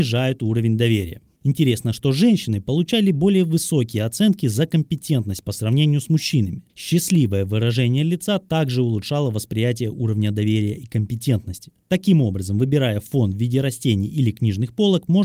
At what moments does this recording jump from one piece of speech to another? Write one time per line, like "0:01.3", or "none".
none